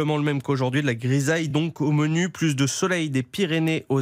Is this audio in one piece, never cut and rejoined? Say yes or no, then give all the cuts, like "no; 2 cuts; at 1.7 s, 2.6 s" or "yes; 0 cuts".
yes; 0 cuts